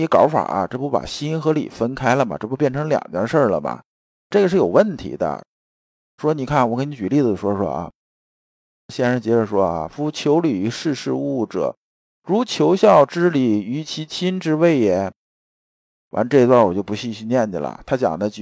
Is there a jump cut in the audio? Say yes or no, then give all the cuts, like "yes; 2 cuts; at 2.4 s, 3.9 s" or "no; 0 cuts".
yes; 1 cut; at 6.2 s